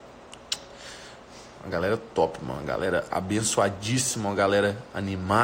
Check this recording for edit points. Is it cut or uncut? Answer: uncut